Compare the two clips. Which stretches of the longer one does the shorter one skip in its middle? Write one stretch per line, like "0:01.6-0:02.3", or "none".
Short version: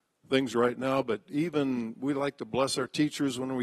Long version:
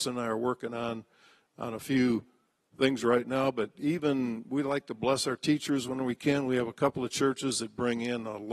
none